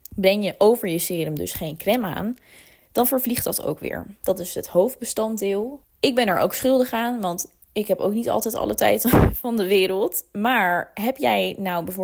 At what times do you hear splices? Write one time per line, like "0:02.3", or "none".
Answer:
0:04.2
0:05.8